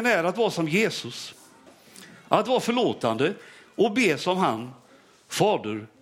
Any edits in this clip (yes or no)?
no